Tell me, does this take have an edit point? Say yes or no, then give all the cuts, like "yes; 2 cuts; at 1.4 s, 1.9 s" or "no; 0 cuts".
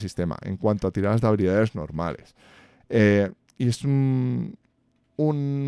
yes; 1 cut; at 2.8 s